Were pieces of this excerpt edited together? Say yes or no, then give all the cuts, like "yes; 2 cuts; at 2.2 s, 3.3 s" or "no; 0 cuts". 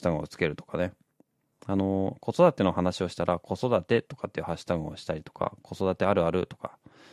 yes; 1 cut; at 1.5 s